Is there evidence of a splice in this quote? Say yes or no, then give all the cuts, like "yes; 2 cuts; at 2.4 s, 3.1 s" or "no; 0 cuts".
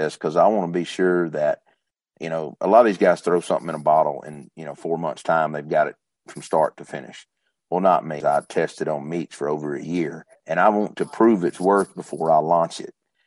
yes; 2 cuts; at 8.2 s, 10.3 s